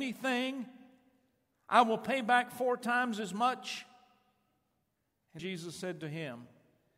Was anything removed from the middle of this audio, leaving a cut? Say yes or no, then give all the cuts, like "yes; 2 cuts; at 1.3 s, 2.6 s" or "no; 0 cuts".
yes; 1 cut; at 5.4 s